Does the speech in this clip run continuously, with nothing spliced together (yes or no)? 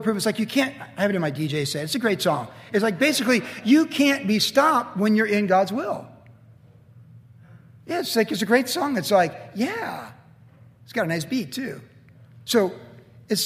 yes